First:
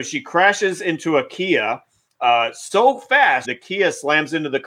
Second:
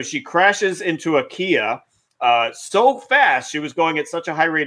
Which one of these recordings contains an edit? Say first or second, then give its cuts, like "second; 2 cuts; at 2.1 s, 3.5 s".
first; 1 cut; at 3.4 s